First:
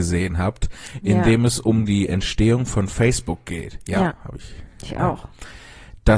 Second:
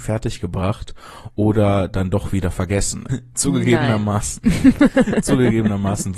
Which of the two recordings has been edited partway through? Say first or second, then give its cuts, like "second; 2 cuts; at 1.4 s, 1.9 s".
second; 1 cut; at 3.1 s